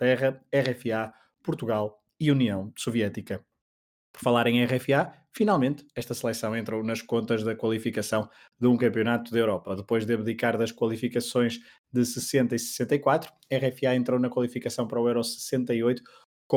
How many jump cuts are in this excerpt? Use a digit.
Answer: 0